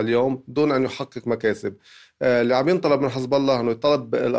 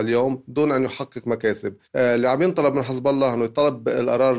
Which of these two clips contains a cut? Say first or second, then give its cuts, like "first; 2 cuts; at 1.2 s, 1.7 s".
second; 1 cut; at 1.8 s